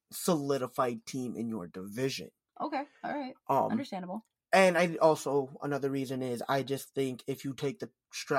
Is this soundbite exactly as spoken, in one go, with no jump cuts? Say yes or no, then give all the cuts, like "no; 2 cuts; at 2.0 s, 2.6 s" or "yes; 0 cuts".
yes; 0 cuts